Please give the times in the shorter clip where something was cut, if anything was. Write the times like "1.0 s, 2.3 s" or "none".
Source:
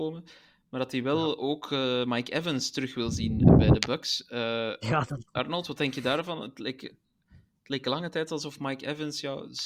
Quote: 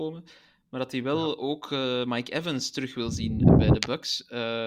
none

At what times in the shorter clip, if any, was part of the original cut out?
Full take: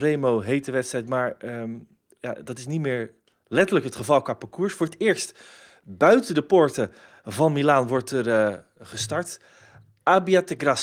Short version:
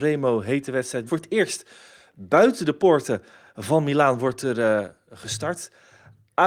1.1 s

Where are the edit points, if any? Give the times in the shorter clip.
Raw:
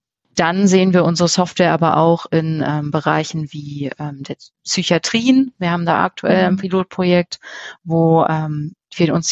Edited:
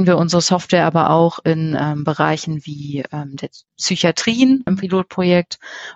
4.7 s

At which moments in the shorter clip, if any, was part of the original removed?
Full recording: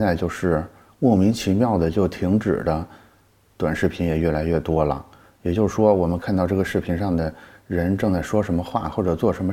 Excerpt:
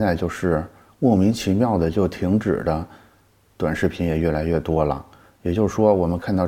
none

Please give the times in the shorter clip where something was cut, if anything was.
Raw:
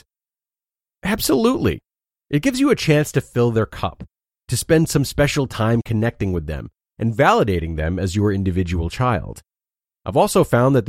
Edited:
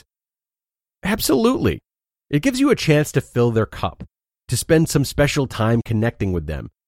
none

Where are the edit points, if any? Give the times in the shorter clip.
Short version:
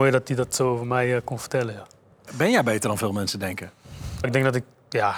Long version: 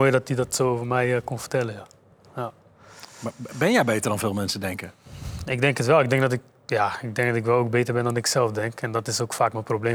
2.3 s, 4.2 s

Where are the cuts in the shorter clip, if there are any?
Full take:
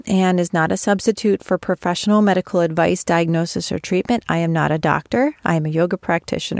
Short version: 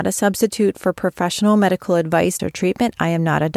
2.4 s

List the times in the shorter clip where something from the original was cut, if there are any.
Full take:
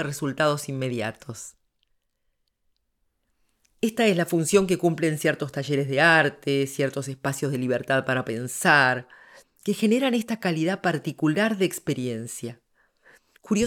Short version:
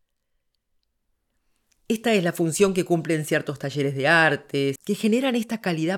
4.8 s

